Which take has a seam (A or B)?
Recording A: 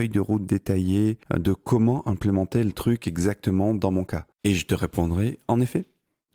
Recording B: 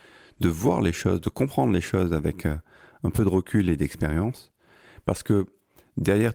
A